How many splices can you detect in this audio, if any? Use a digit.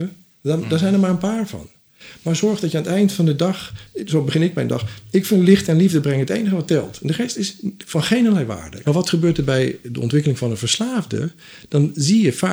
1